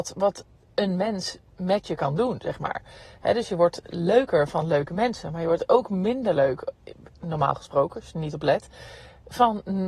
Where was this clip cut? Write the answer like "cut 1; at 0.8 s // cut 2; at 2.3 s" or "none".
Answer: none